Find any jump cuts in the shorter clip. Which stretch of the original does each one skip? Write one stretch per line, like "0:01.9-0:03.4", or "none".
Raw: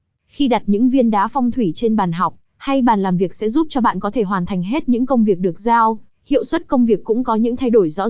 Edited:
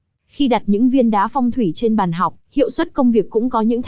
0:02.4-0:06.2